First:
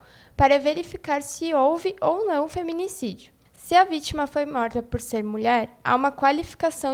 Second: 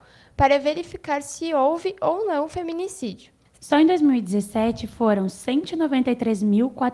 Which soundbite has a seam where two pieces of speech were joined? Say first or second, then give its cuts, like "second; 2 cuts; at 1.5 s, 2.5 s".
second; 1 cut; at 3.6 s